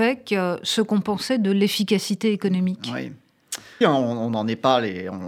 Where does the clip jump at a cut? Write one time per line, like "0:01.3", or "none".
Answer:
0:03.8